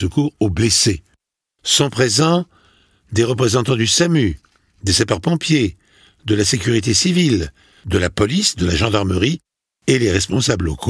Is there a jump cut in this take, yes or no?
yes